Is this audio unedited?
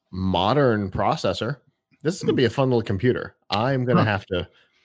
yes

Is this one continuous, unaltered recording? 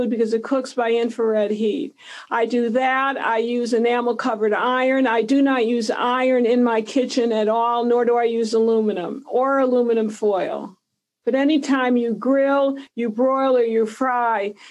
no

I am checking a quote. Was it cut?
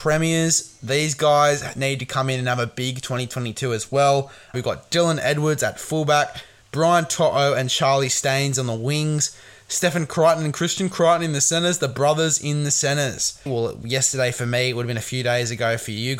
yes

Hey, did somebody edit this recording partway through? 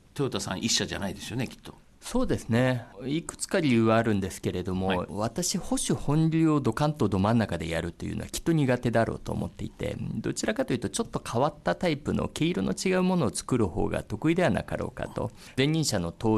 no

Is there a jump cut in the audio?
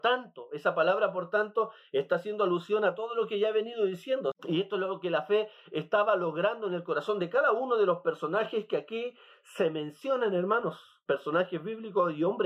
yes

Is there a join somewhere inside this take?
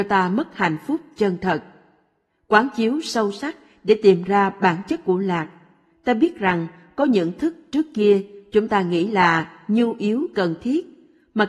yes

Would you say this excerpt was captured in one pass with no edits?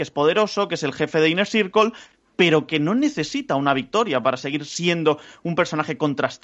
yes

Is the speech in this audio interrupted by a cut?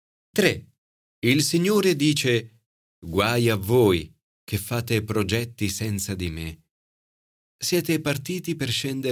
yes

